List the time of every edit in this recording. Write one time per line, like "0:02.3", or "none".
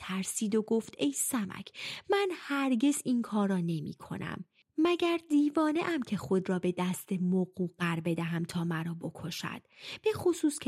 none